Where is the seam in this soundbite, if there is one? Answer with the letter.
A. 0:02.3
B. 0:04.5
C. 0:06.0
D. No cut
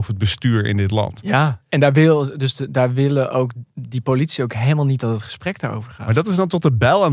D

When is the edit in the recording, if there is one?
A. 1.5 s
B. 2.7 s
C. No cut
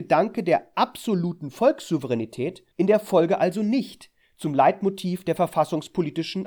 B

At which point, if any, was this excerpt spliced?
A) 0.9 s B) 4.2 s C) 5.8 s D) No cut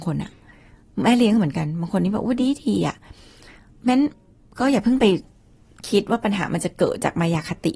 D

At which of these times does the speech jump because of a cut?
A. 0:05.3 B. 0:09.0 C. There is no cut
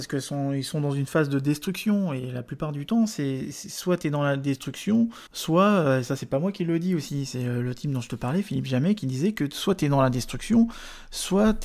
A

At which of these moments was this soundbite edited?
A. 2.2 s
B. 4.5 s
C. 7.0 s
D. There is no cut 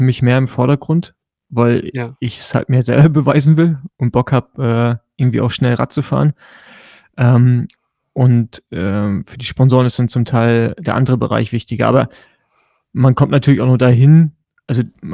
D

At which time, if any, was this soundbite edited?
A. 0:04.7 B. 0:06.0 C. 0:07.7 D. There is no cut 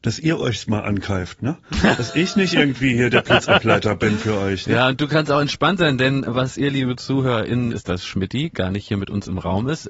C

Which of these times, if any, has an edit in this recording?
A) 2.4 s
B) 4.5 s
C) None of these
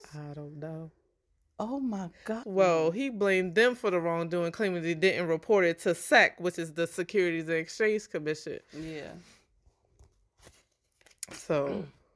A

